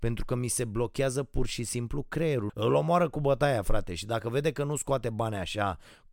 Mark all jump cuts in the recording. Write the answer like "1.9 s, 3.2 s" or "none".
2.5 s